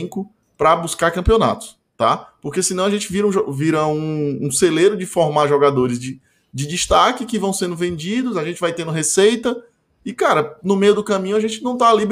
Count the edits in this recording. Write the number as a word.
zero